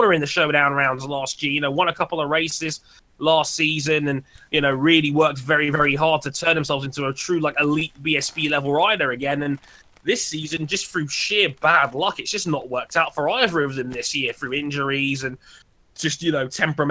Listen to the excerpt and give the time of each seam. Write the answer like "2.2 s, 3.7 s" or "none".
none